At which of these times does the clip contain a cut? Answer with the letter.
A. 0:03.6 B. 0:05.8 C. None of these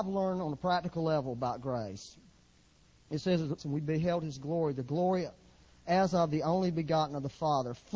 A